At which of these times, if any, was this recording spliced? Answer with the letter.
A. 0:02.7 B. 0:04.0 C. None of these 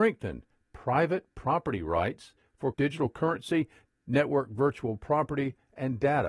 A